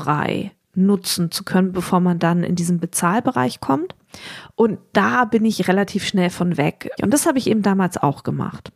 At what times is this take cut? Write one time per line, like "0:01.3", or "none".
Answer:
0:07.0